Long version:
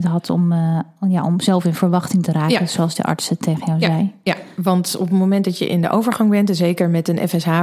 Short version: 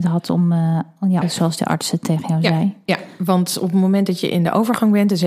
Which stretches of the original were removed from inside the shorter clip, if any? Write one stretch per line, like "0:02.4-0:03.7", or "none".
0:01.2-0:02.6